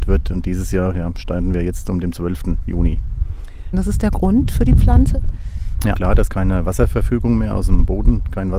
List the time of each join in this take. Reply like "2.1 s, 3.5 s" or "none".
3.7 s, 5.9 s

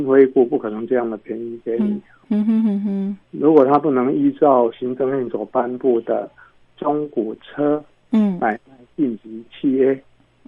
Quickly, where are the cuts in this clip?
3.2 s

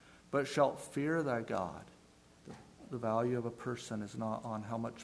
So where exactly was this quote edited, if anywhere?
2.4 s

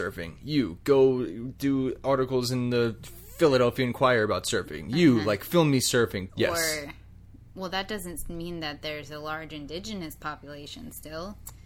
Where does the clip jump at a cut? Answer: 6.3 s

